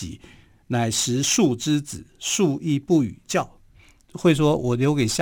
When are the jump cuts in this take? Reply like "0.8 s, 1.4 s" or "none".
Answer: 4.1 s